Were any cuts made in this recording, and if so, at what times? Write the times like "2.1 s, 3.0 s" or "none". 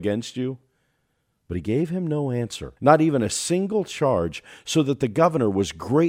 2.8 s